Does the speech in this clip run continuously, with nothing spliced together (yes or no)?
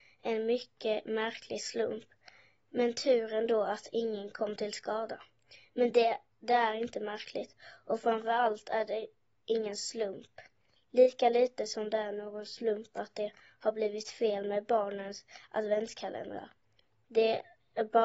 yes